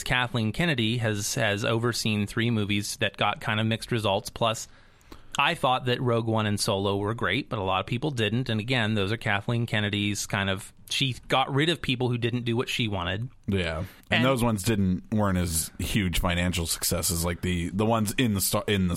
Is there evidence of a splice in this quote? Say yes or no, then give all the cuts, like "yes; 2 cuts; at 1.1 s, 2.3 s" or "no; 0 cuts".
yes; 1 cut; at 14.0 s